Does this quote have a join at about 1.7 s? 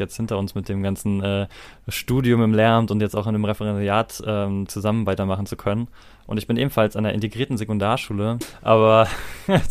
no; 2 cuts; at 4.7 s, 8.4 s

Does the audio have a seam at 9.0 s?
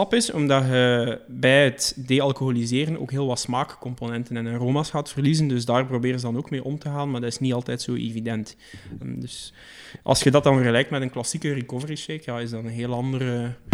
yes; 1 cut; at 9.0 s

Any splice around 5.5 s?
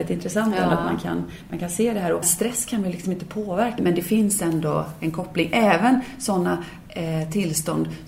no; 2 cuts; at 2.2 s, 3.8 s

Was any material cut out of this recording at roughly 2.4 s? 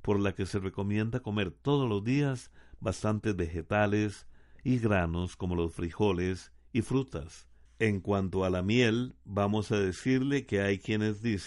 no; 1 cut; at 7.7 s

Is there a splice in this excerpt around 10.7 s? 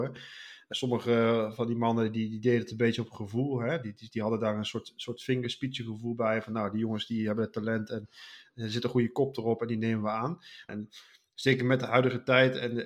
yes; 1 cut; at 10.7 s

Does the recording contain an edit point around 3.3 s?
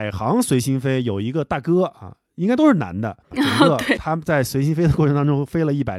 yes; 1 cut; at 3.3 s

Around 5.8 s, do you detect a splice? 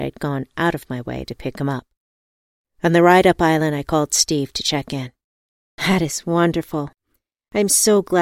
yes; 1 cut; at 5.8 s

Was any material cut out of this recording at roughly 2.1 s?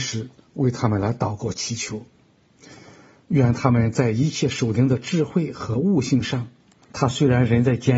no; 1 cut; at 6.8 s

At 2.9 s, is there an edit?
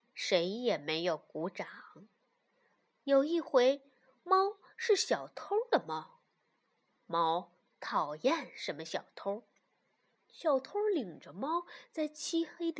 yes; 1 cut; at 2.9 s

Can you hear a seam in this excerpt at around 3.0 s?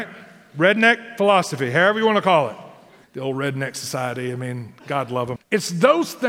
yes; 2 cuts; at 3.0 s, 5.4 s

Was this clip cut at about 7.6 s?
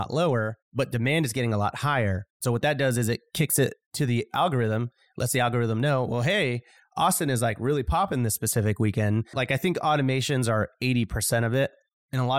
no; 1 cut; at 9.3 s

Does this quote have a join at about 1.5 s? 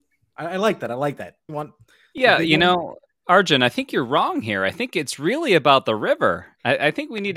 yes; 1 cut; at 1.5 s

